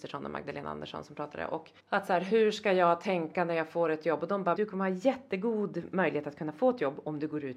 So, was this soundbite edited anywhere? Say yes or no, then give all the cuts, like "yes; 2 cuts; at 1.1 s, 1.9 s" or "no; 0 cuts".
yes; 2 cuts; at 1.8 s, 4.5 s